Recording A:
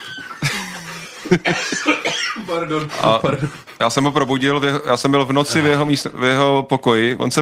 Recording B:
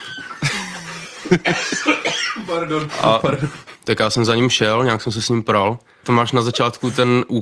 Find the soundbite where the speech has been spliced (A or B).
B